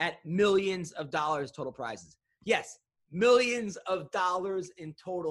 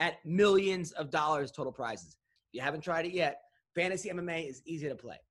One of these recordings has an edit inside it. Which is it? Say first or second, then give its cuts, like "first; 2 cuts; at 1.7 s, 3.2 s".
second; 1 cut; at 2.4 s